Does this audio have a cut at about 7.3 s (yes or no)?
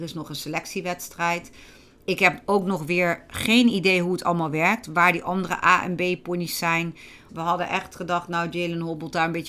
yes